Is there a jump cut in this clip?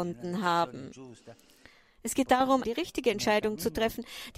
yes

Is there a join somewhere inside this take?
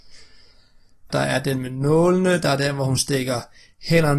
yes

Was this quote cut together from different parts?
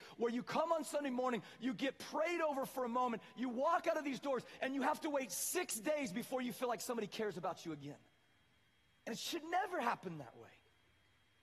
no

